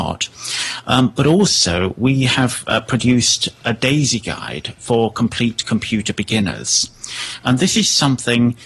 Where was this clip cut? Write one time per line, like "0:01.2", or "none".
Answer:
none

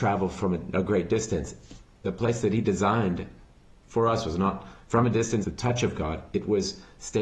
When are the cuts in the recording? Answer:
0:05.4

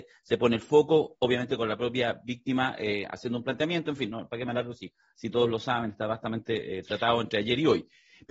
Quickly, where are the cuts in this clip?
none

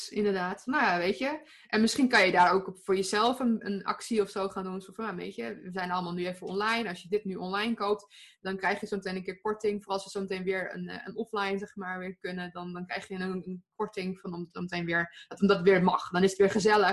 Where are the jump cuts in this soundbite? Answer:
none

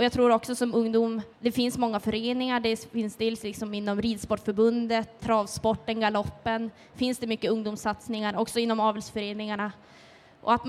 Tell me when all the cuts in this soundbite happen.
0:01.3
0:05.2

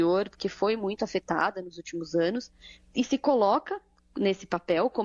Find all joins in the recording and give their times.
0:02.9

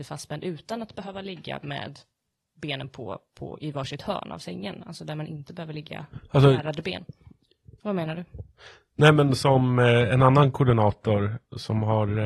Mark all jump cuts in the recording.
0:07.8

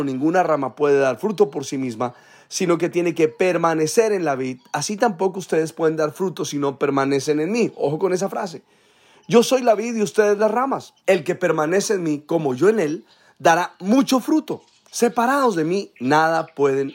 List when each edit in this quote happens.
0:11.0

